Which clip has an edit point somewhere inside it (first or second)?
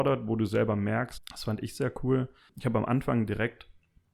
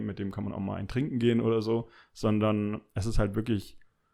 first